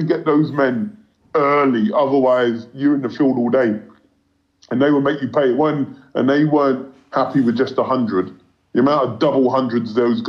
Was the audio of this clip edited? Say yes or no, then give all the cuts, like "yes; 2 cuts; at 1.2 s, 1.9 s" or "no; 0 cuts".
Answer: no; 0 cuts